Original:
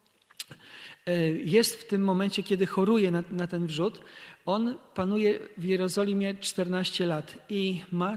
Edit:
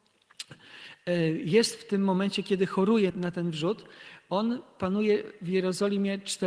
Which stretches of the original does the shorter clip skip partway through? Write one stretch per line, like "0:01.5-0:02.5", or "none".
0:03.1-0:03.3